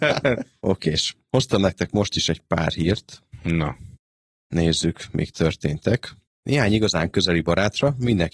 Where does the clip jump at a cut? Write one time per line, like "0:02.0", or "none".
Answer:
0:06.3